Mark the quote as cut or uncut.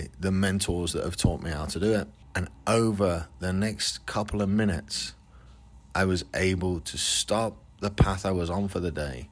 cut